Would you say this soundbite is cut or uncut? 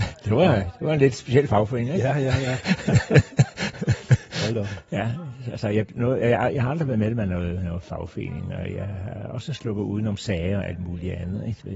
uncut